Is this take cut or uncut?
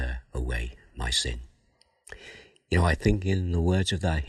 uncut